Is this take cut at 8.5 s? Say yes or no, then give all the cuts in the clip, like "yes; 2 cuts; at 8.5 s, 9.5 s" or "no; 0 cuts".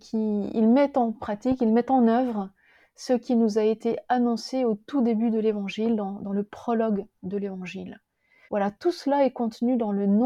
yes; 1 cut; at 8.5 s